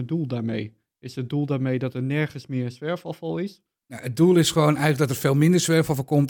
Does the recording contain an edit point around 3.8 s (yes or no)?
yes